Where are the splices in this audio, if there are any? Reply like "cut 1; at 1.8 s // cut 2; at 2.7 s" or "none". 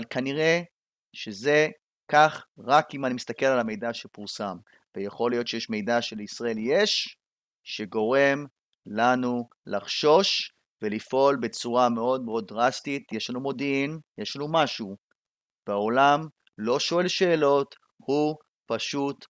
none